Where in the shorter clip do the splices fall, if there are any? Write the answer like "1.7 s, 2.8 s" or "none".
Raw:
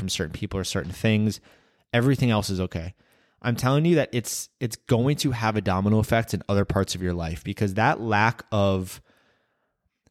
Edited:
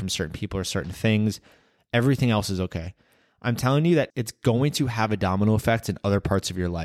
4.1 s